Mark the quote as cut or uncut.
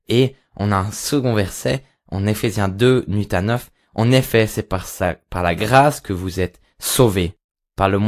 uncut